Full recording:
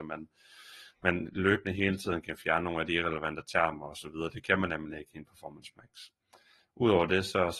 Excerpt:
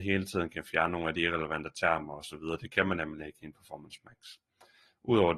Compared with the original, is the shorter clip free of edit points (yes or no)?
yes